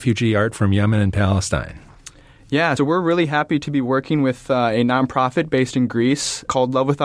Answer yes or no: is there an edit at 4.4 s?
no